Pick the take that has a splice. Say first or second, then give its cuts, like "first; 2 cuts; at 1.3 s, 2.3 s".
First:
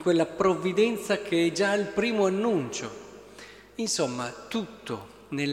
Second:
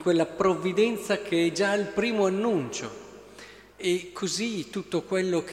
second; 1 cut; at 3.7 s